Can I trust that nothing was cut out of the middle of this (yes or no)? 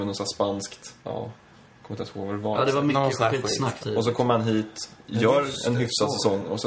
no